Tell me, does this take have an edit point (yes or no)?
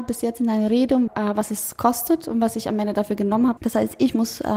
yes